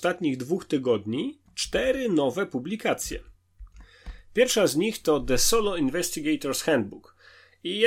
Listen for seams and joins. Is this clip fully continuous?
yes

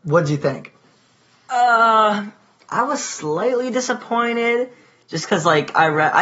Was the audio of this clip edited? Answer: no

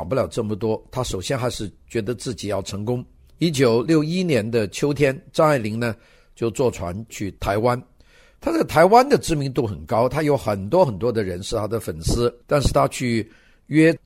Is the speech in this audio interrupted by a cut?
no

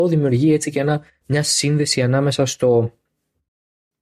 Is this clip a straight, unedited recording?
yes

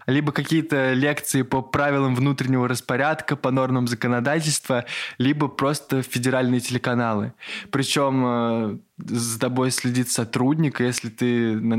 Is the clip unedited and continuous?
yes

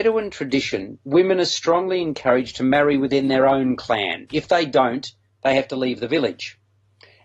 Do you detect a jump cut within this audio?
no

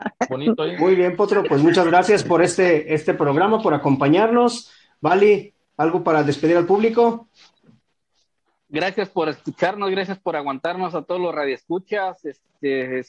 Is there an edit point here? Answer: no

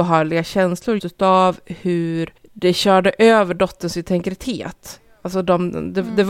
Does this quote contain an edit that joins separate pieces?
yes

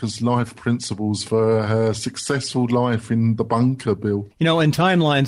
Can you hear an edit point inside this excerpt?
yes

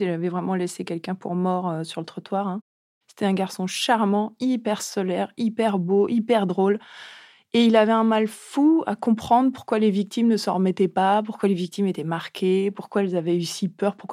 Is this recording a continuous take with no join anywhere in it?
yes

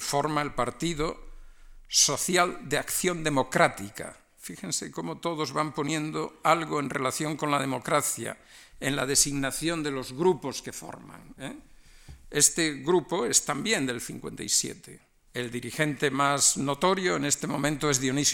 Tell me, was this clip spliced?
yes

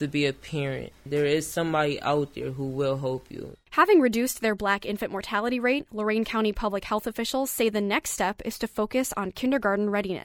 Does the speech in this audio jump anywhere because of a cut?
no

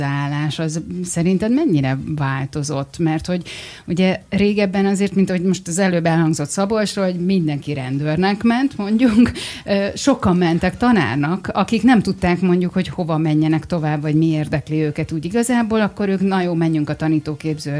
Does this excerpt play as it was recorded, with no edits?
yes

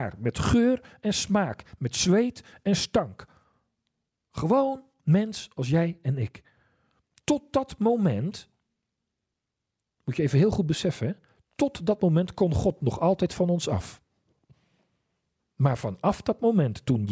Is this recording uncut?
yes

